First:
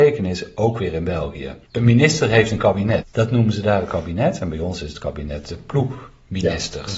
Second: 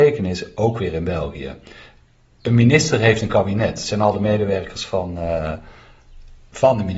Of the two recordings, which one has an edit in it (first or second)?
first